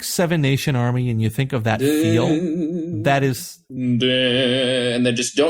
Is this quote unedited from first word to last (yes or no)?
yes